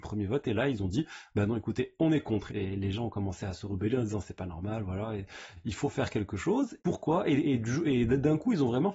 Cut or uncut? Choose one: cut